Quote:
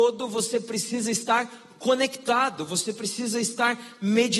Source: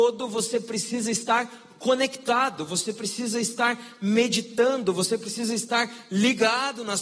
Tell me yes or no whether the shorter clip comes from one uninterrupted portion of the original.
yes